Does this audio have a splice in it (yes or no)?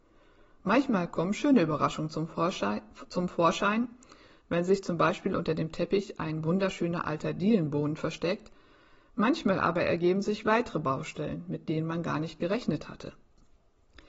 no